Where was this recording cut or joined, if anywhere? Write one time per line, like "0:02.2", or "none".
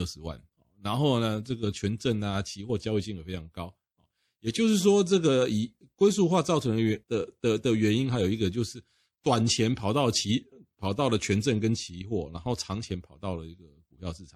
0:07.0